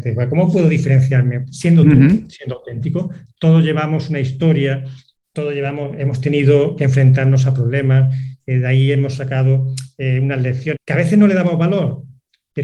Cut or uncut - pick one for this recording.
cut